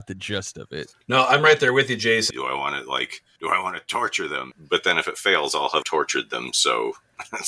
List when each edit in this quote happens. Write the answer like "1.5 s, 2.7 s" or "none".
2.3 s, 4.5 s, 5.8 s